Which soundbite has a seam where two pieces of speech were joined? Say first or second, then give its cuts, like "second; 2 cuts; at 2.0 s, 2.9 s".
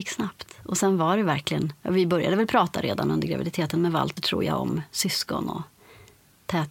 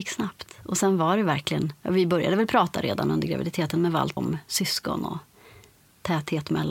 second; 1 cut; at 4.2 s